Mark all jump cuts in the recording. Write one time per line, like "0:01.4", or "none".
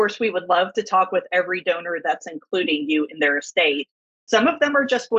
none